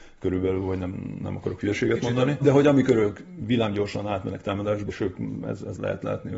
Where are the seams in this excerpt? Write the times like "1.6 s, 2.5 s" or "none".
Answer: 2.4 s, 4.9 s